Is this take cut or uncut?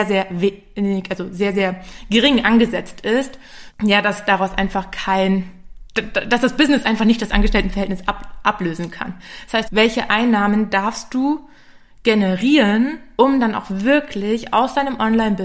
cut